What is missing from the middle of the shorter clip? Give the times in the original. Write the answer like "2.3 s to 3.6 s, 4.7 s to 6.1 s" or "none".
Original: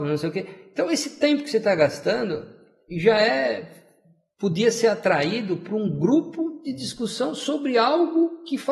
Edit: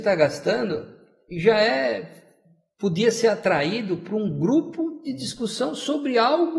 none